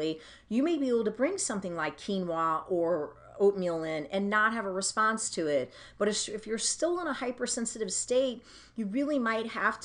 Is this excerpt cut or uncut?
uncut